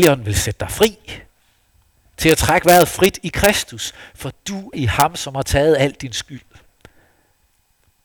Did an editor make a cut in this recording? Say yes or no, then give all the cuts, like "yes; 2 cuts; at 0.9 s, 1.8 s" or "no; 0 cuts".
yes; 1 cut; at 4.7 s